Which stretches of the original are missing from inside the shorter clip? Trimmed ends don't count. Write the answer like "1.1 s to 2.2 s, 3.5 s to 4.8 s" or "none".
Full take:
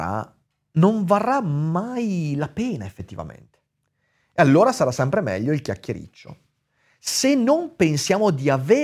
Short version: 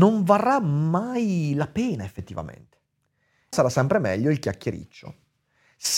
4.3 s to 4.7 s